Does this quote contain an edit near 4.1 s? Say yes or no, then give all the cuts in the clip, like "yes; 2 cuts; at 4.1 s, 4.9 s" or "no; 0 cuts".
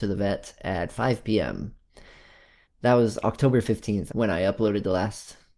yes; 2 cuts; at 2.6 s, 4.1 s